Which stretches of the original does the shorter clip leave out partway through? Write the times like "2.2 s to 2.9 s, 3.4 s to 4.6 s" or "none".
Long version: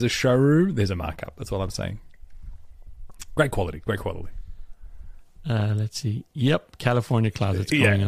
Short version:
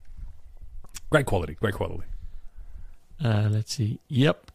none